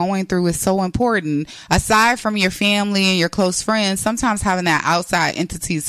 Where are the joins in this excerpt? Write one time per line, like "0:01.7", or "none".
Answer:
none